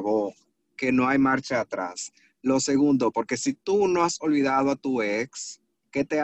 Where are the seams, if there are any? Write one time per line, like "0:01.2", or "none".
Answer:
0:03.1